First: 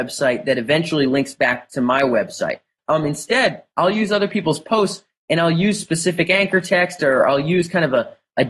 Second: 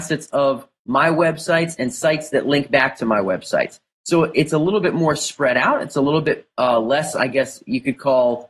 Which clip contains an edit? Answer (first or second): first